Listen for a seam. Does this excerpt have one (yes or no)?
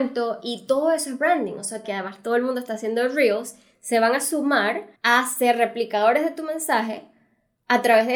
yes